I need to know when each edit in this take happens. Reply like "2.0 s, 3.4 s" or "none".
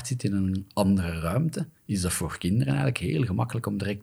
1.8 s